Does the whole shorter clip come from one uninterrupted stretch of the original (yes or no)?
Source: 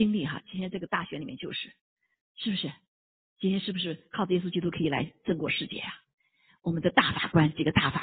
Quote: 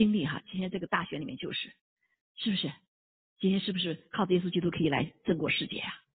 yes